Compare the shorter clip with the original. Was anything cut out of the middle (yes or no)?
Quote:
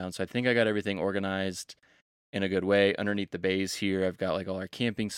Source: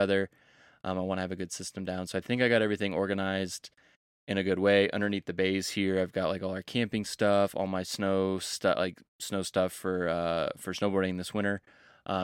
no